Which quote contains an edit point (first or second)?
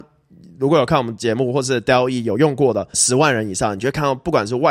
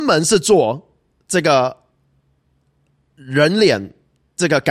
first